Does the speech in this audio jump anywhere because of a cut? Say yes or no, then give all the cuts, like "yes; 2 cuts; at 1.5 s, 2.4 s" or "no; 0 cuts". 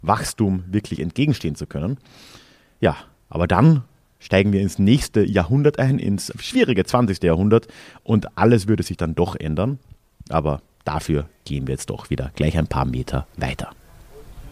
yes; 1 cut; at 6.3 s